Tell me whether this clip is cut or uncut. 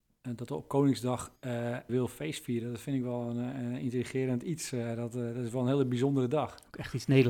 cut